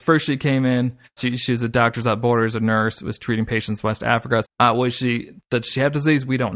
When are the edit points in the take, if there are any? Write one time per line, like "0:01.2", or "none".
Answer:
0:01.2
0:04.4